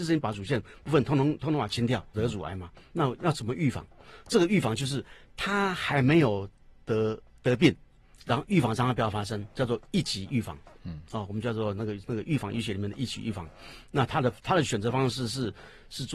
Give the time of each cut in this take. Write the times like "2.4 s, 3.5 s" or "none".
2.1 s